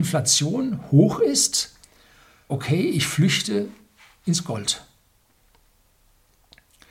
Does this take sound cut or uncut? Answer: cut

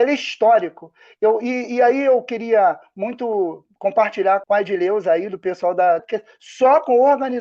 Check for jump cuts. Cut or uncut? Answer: cut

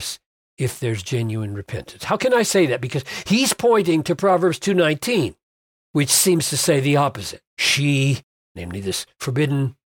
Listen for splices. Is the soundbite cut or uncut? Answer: cut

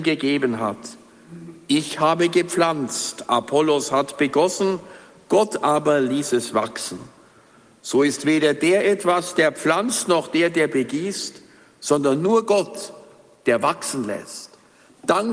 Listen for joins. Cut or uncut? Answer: uncut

